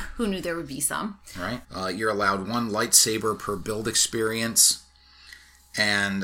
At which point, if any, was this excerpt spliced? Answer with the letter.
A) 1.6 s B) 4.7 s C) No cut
A